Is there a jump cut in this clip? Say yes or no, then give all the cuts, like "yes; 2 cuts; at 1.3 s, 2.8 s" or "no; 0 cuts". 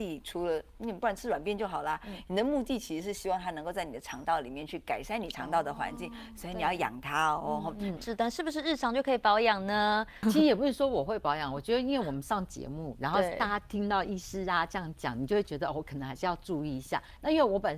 yes; 2 cuts; at 8.0 s, 10.2 s